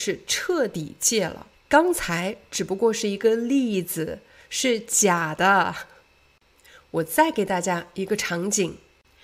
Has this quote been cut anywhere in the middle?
yes; 1 cut; at 1.5 s

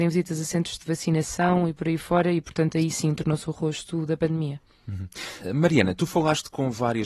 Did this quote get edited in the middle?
no; 0 cuts

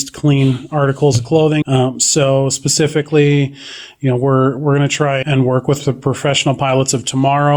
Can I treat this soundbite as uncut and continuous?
no; 2 cuts; at 1.6 s, 5.2 s

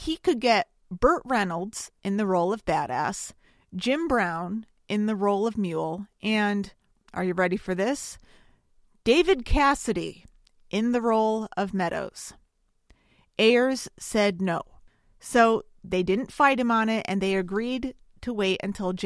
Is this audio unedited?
yes; 0 cuts

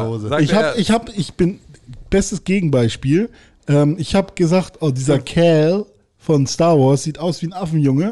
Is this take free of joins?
yes; 0 cuts

